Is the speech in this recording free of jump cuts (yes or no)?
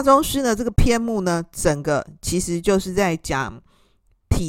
yes